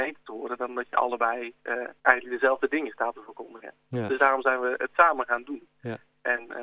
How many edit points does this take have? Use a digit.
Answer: 1